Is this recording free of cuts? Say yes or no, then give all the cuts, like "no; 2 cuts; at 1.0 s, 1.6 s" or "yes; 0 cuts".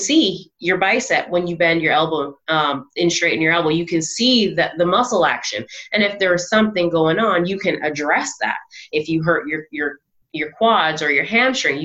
yes; 0 cuts